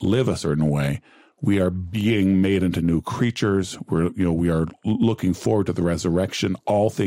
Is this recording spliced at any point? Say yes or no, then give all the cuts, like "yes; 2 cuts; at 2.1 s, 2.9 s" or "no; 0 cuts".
no; 0 cuts